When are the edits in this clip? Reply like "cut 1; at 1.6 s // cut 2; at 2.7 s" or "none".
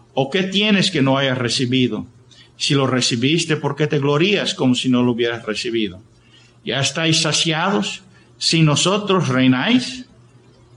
cut 1; at 8.3 s